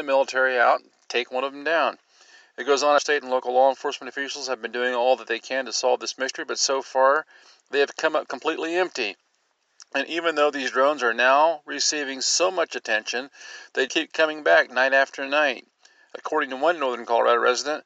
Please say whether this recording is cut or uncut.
cut